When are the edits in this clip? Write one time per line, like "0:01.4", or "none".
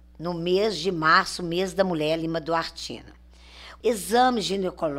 0:03.8